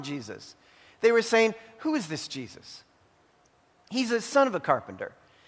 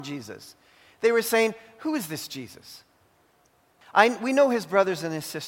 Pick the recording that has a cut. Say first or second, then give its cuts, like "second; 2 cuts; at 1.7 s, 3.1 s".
second; 1 cut; at 3.8 s